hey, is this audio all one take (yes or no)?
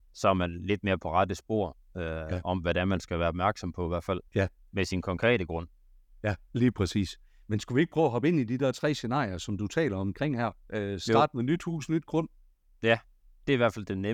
no